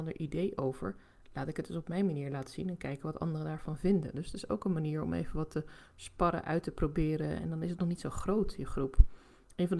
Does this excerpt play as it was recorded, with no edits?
yes; 0 cuts

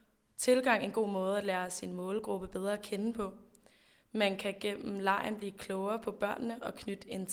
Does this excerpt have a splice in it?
no; 0 cuts

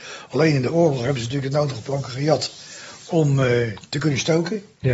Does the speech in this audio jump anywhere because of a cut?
no; 0 cuts

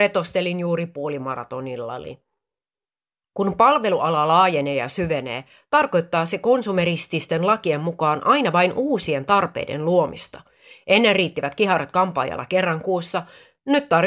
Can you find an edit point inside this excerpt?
no; 0 cuts

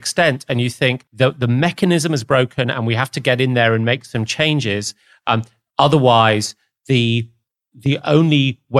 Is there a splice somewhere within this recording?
yes; 1 cut; at 1.1 s

